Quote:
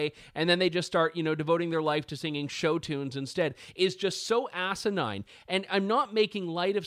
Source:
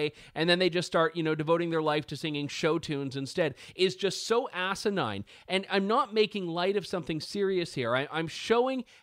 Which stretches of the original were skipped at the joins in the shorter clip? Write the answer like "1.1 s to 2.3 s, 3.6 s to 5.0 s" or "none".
none